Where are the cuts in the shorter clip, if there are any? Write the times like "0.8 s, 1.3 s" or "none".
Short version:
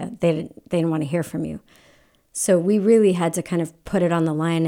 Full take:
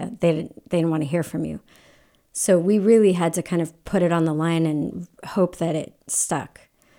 none